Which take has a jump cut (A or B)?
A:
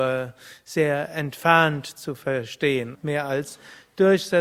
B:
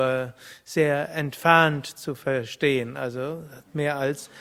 A